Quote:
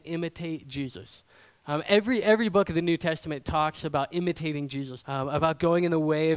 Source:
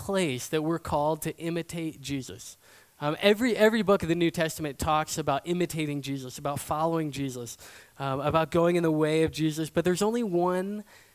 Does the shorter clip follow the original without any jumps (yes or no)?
no